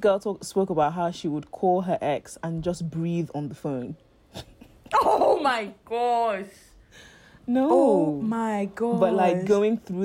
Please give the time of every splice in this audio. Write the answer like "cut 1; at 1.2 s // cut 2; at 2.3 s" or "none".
none